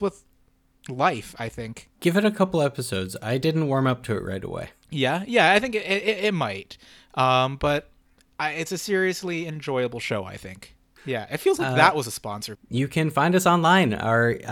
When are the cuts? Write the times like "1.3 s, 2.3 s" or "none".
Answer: 11.0 s, 12.5 s